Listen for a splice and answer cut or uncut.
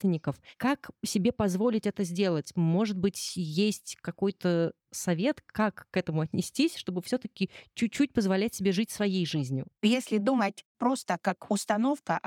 cut